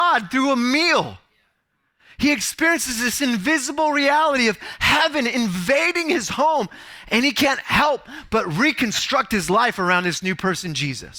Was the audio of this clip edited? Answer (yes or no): no